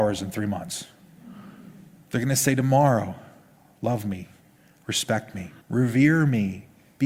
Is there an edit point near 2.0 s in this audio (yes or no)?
no